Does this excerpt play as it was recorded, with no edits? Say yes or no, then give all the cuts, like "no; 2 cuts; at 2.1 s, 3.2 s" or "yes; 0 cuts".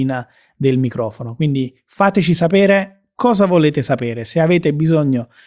yes; 0 cuts